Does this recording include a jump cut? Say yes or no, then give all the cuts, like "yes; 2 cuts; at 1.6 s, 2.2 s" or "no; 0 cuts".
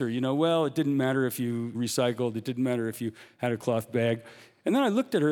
no; 0 cuts